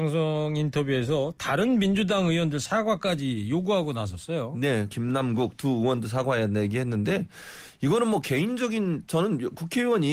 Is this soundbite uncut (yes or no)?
no